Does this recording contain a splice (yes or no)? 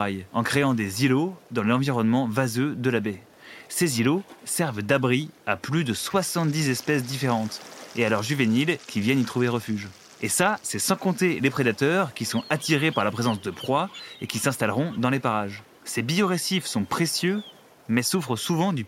no